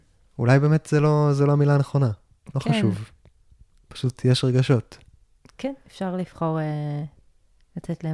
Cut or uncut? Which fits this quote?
uncut